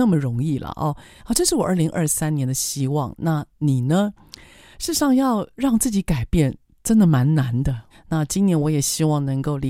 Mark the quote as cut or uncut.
cut